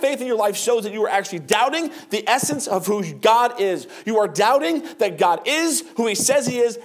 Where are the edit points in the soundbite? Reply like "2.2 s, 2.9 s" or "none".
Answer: none